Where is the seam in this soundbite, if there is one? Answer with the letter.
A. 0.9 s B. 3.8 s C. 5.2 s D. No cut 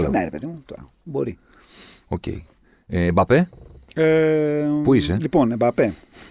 A